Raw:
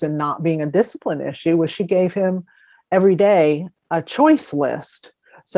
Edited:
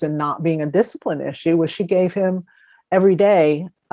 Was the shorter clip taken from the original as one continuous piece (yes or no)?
yes